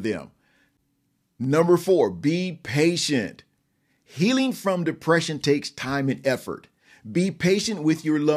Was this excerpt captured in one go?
yes; 0 cuts

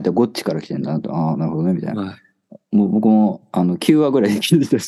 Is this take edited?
no; 0 cuts

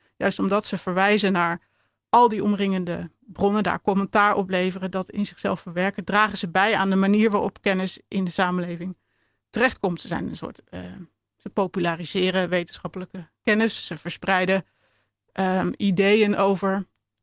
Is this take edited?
no; 0 cuts

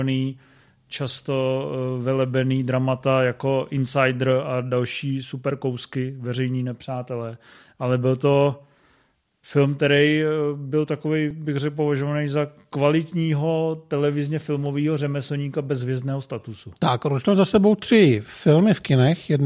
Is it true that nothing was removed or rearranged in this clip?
yes; 0 cuts

